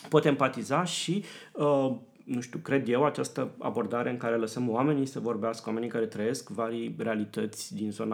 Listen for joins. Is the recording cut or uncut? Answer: uncut